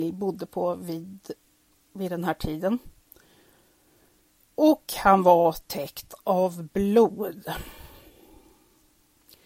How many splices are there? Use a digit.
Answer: 0